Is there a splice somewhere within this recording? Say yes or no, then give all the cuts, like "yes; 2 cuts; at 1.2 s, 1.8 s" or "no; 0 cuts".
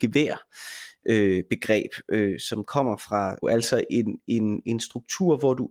yes; 1 cut; at 3.4 s